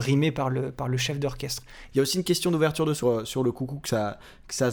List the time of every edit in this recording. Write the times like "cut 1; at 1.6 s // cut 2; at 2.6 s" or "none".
cut 1; at 1.9 s // cut 2; at 3.0 s